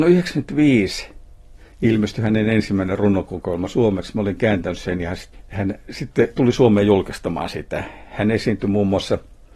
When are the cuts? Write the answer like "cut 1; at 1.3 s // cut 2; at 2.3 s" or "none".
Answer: none